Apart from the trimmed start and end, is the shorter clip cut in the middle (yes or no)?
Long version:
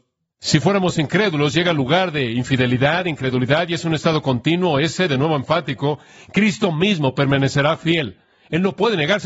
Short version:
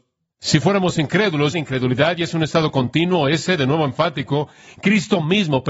yes